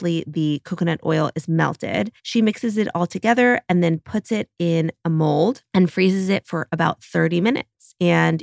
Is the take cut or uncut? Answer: cut